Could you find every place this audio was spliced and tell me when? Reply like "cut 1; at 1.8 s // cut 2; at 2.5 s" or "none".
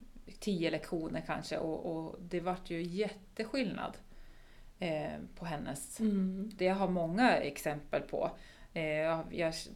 cut 1; at 6.6 s

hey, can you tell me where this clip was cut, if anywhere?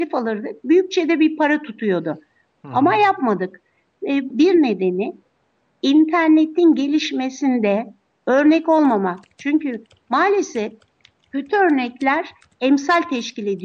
cut 1; at 4.3 s

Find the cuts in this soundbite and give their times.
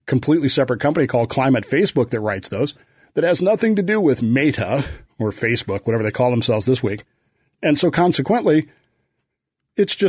none

